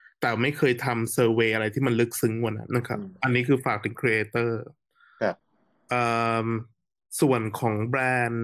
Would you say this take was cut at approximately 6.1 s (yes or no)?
no